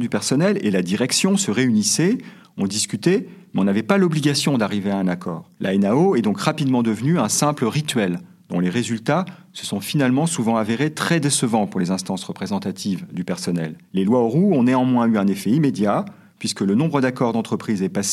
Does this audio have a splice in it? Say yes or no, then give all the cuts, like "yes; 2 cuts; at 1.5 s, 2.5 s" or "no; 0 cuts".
yes; 2 cuts; at 5.6 s, 13.9 s